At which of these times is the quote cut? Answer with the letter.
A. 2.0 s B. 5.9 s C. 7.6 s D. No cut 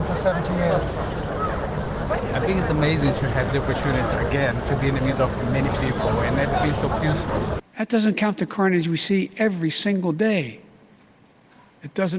C